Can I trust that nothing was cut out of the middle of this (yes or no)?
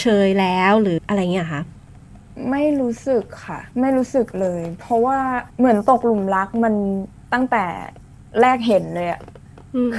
no